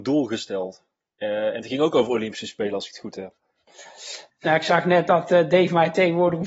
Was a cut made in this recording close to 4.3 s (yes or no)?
yes